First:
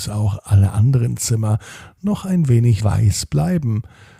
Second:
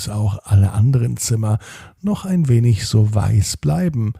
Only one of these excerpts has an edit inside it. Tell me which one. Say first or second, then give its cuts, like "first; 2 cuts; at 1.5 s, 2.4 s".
first; 1 cut; at 2.8 s